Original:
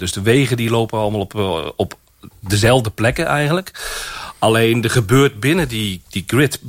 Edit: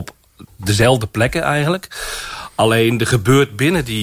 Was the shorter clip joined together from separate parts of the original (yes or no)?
no